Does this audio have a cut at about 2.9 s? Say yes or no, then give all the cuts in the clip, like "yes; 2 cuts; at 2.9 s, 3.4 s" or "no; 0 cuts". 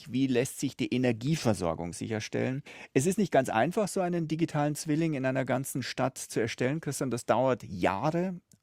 no; 0 cuts